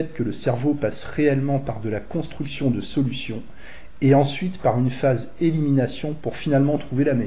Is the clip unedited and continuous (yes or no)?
yes